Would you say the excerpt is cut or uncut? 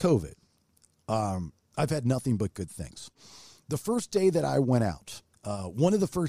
cut